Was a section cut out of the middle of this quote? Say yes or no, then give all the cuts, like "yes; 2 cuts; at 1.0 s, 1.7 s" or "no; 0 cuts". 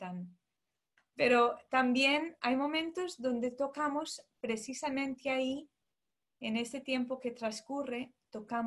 yes; 1 cut; at 1.1 s